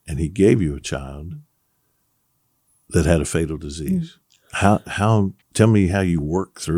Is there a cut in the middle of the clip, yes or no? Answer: yes